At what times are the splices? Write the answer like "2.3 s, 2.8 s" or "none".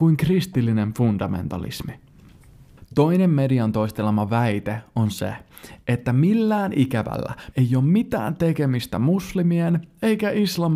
7.5 s